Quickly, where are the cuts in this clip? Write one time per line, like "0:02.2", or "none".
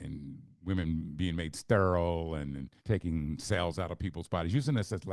0:02.8